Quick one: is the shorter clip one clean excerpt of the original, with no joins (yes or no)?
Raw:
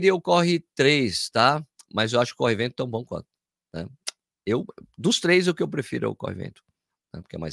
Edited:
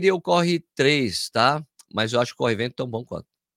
yes